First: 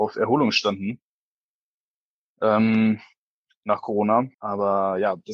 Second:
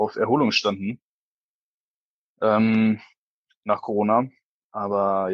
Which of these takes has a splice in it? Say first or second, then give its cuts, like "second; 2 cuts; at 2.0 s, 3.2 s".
first; 1 cut; at 4.3 s